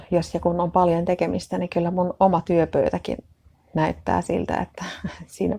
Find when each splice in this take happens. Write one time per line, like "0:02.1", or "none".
none